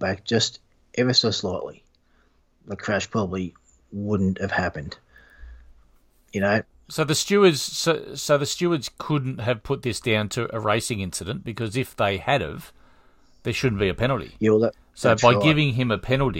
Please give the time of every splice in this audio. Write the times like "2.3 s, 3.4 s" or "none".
none